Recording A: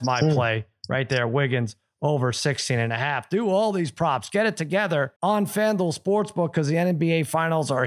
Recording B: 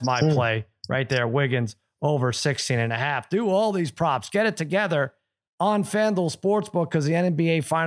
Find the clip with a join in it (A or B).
A